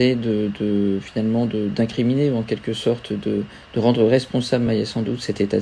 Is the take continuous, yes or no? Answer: yes